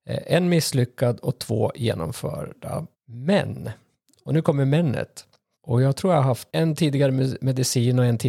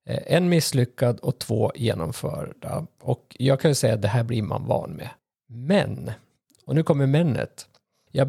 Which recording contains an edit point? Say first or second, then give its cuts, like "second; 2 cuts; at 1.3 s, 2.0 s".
first; 2 cuts; at 2.9 s, 5.5 s